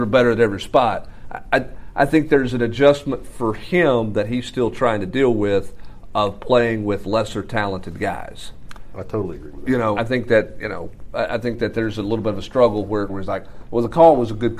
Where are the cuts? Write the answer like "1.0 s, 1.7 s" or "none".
10.0 s, 13.1 s